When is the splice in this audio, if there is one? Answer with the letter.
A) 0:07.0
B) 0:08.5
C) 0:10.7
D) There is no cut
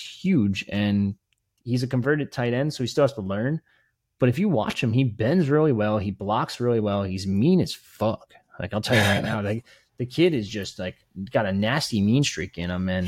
D